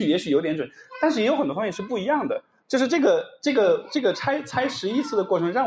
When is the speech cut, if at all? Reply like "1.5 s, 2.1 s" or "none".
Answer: none